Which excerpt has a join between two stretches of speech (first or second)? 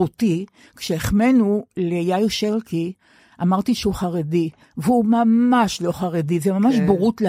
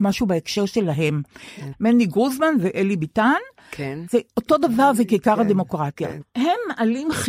second